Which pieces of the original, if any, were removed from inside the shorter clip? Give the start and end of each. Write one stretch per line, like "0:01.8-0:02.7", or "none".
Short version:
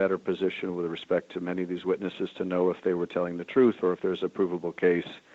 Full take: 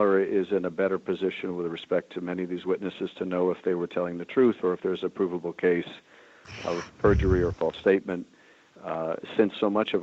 none